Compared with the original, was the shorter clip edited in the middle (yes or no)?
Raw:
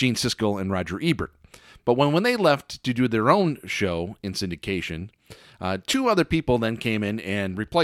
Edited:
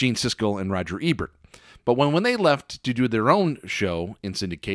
no